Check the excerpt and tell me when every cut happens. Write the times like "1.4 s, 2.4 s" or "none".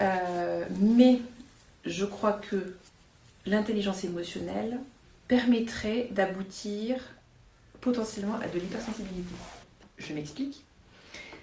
none